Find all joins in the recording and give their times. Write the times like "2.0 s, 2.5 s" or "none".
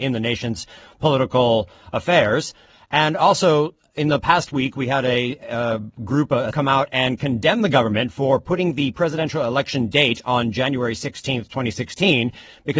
6.5 s

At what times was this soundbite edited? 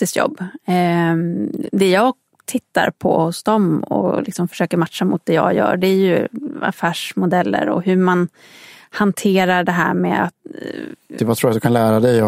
11.2 s

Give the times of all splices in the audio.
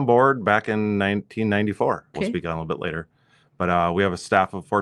2.1 s

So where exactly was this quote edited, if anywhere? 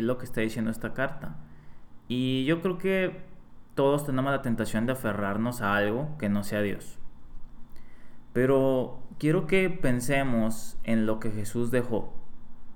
none

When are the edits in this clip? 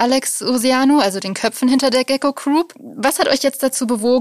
none

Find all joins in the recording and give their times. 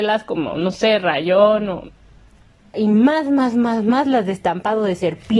2.7 s

